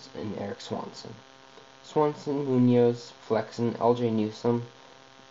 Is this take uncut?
yes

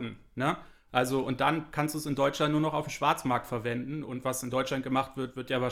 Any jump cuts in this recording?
yes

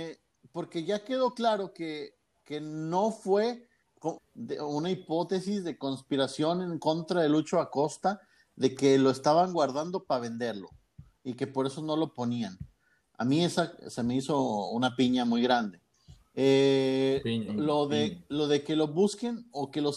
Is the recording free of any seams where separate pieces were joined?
no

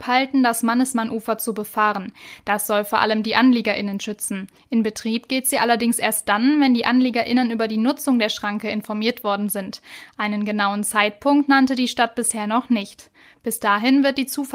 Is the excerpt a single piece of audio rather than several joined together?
yes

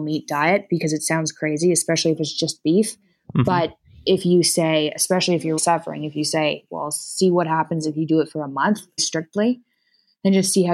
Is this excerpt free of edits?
no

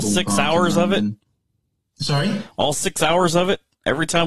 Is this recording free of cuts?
yes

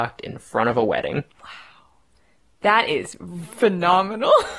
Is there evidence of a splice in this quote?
yes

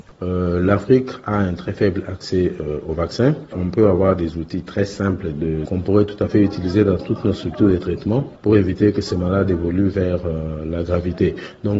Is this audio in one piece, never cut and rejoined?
no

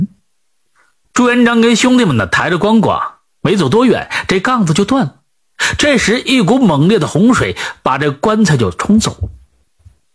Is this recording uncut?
yes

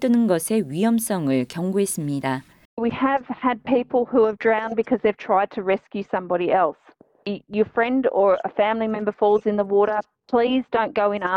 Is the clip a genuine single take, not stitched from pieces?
yes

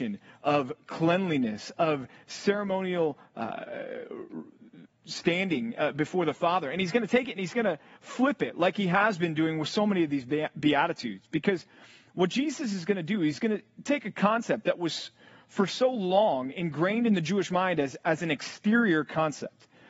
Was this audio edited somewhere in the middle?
no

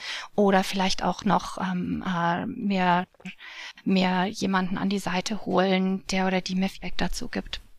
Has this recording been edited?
no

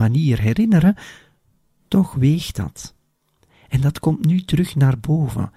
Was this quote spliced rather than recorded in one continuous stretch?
no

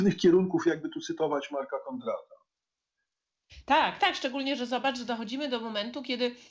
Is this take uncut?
no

